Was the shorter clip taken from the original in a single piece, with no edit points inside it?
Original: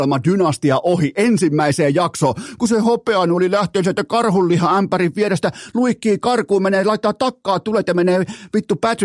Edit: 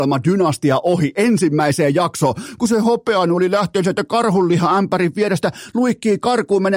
yes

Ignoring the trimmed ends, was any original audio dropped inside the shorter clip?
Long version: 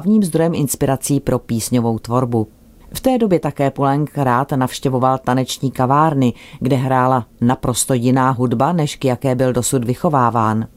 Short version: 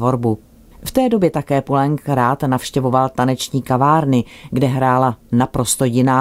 no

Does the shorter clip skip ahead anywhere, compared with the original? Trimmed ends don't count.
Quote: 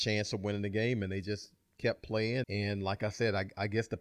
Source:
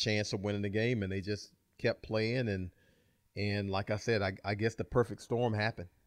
yes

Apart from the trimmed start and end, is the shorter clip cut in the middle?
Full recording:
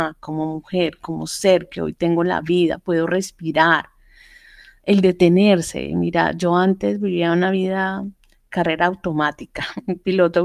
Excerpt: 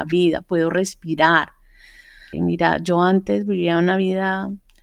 yes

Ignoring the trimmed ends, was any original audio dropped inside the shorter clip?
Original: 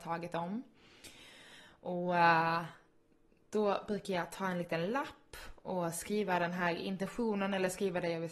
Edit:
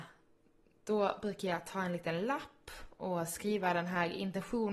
no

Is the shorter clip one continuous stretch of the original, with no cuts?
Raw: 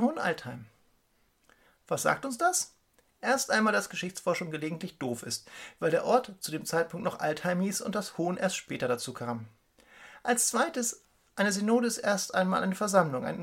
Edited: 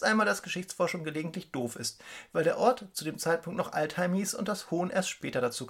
yes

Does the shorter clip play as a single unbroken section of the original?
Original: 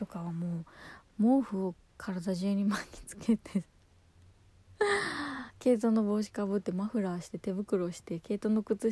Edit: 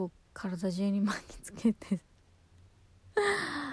yes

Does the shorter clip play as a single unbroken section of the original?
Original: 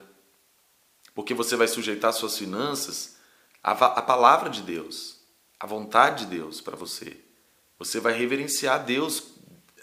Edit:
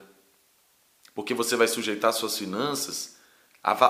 yes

